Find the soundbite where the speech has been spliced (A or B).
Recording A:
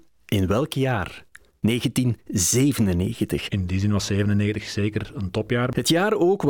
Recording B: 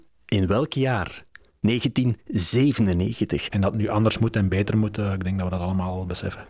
B